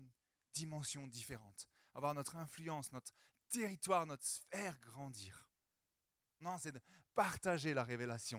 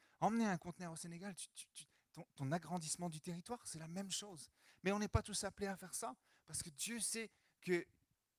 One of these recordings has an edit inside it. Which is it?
first; 1 cut; at 6.4 s

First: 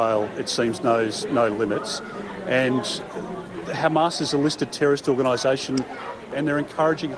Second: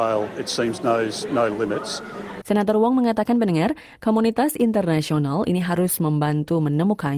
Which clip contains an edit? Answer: second; 1 cut; at 2.4 s

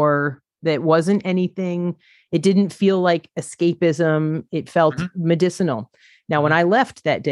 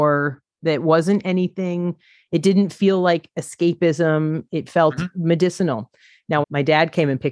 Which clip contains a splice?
second; 1 cut; at 6.4 s

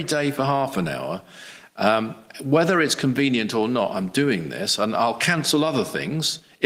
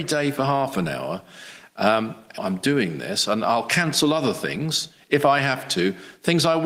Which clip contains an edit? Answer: second; 1 cut; at 2.4 s

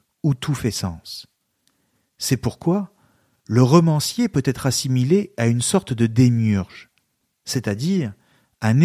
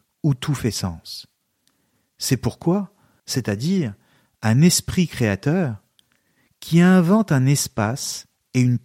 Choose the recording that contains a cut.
second; 1 cut; at 3.2 s

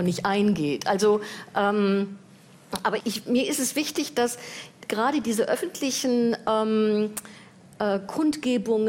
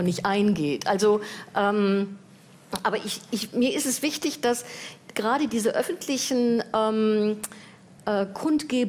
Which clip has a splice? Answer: first; 1 cut; at 3.0 s

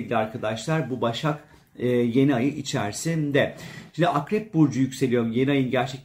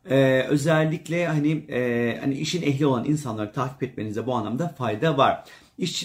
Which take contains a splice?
first; 1 cut; at 3.9 s

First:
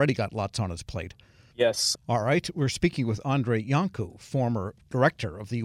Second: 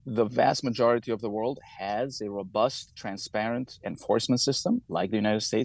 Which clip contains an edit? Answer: first; 1 cut; at 1.9 s

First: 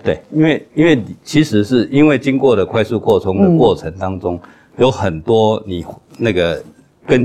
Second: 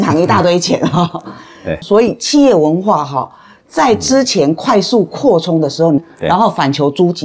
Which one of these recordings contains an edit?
second; 2 cuts; at 1.8 s, 6.0 s

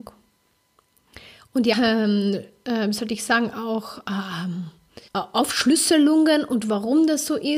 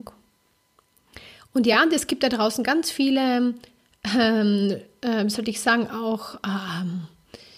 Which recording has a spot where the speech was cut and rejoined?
first; 2 cuts; at 1.7 s, 5.1 s

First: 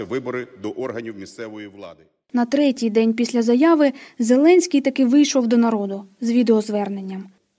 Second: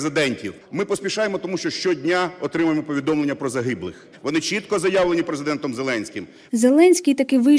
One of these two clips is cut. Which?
second; 2 cuts; at 4.1 s, 6.5 s

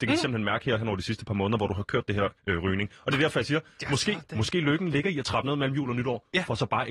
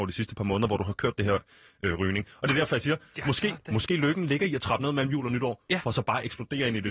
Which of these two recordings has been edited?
first; 1 cut; at 2.4 s

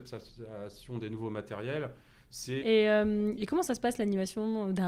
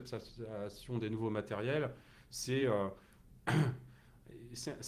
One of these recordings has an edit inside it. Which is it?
first; 1 cut; at 2.6 s

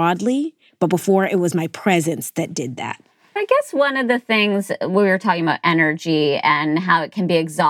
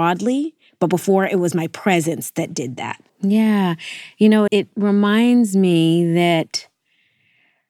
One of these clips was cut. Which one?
second; 2 cuts; at 3.1 s, 4.5 s

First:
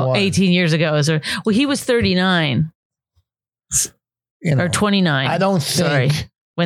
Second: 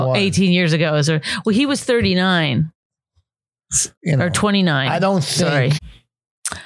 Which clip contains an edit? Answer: second; 2 cuts; at 3.9 s, 5.7 s

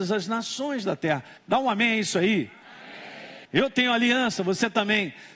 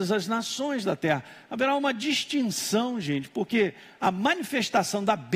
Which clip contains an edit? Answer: first; 2 cuts; at 1.4 s, 3.4 s

